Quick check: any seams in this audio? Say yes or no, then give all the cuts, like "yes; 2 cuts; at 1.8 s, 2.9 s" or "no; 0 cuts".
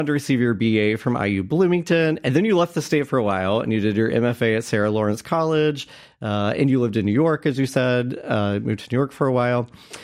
no; 0 cuts